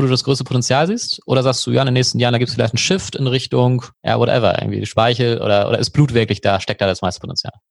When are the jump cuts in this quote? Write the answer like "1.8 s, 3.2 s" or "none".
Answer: 3.9 s